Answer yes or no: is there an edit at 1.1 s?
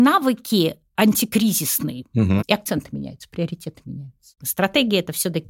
no